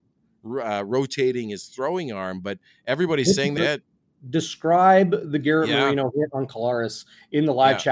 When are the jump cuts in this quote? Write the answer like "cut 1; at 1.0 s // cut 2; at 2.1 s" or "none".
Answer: cut 1; at 3.6 s